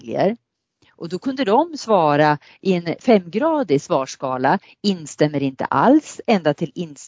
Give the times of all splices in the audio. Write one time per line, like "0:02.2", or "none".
none